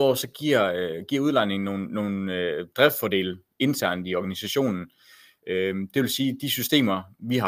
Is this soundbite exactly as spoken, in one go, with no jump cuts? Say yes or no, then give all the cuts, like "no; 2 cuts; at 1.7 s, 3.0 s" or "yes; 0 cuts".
yes; 0 cuts